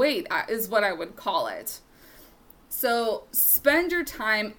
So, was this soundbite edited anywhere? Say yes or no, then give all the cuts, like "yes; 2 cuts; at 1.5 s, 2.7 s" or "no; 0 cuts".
no; 0 cuts